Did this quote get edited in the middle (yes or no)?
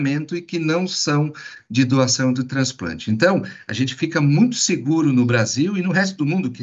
no